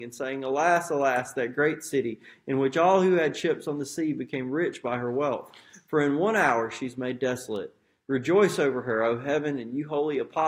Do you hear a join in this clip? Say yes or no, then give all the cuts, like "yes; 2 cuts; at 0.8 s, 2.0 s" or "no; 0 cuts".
no; 0 cuts